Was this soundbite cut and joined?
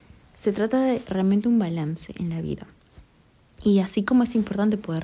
no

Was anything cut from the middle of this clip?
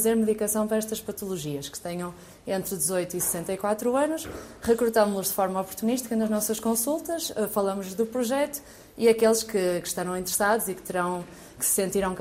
no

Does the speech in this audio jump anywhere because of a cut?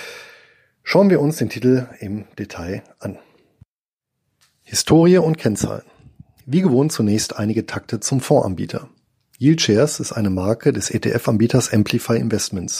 no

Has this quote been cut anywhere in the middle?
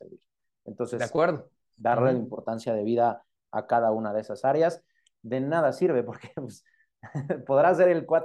yes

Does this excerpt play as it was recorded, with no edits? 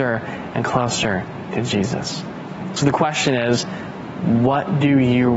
yes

